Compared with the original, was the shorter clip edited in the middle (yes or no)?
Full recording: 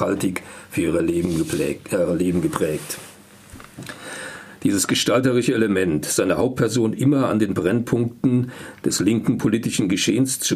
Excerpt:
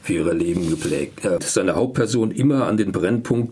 yes